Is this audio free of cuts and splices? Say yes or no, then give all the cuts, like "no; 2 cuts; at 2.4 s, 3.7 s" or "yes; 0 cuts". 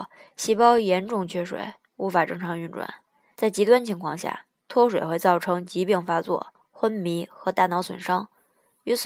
no; 1 cut; at 3.3 s